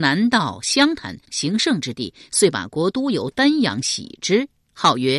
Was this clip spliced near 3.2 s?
no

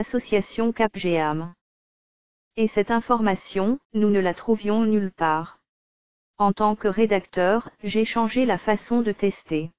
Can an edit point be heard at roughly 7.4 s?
no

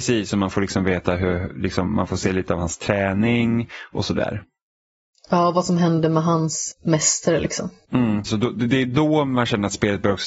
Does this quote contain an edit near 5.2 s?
no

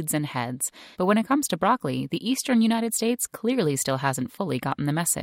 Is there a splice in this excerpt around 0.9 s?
yes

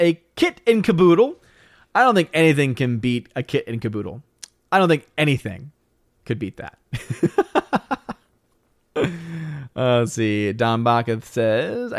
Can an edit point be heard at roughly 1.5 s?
no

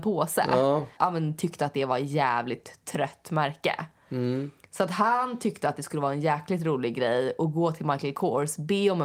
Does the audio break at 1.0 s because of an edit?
yes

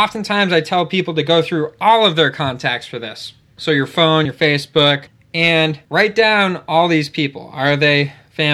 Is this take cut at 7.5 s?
no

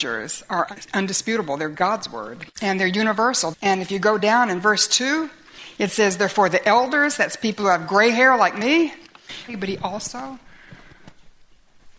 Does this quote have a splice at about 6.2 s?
no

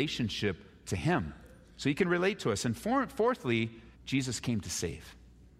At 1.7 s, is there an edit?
no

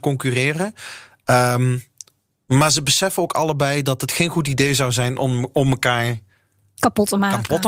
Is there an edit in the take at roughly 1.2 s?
no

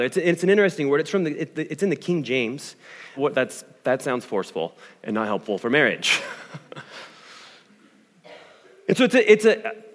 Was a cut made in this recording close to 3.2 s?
yes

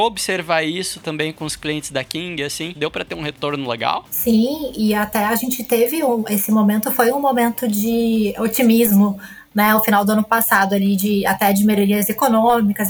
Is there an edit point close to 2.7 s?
yes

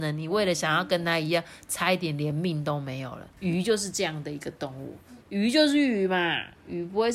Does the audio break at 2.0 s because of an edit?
no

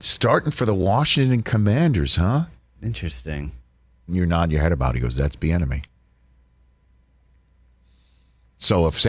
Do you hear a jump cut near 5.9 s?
no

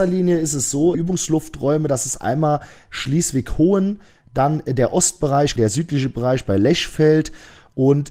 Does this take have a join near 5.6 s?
yes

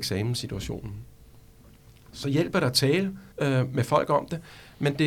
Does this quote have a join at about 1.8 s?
no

